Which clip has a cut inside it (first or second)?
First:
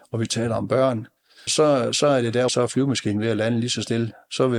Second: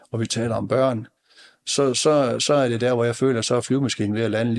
first